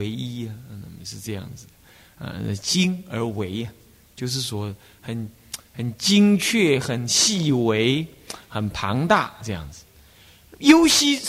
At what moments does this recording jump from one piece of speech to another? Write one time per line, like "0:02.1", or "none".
none